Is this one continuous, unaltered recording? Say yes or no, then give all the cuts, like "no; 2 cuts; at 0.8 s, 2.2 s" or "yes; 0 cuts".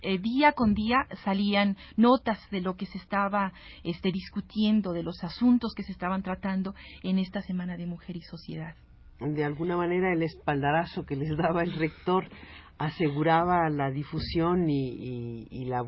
yes; 0 cuts